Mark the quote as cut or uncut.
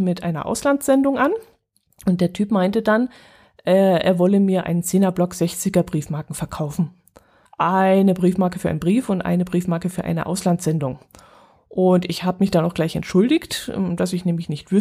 cut